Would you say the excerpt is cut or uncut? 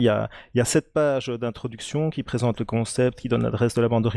uncut